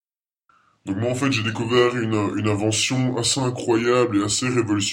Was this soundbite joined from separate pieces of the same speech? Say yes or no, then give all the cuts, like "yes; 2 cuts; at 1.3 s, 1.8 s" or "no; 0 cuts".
no; 0 cuts